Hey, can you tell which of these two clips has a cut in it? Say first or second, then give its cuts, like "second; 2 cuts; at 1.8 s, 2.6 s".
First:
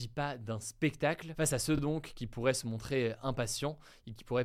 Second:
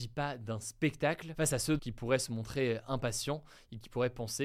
second; 1 cut; at 1.8 s